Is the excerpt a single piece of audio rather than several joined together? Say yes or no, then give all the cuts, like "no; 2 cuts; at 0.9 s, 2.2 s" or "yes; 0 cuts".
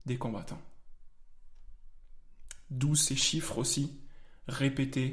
yes; 0 cuts